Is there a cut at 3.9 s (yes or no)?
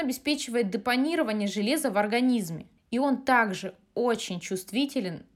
no